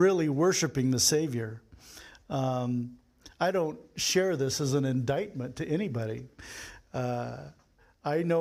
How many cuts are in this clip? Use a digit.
0